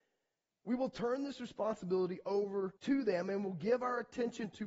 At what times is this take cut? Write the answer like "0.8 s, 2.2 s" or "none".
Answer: 2.8 s